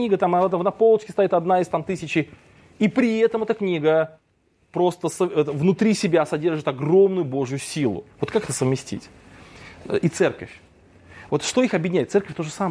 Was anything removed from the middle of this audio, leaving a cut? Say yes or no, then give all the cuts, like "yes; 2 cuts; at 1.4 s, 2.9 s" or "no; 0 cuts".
no; 0 cuts